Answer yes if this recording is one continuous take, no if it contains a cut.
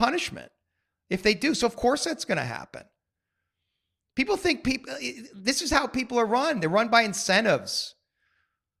yes